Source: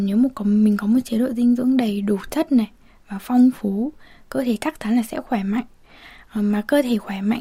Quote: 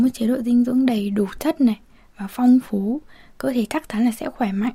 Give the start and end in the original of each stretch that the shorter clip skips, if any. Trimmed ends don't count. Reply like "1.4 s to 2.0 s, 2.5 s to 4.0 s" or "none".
none